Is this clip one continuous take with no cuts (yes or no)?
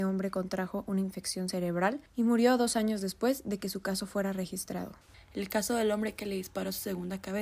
no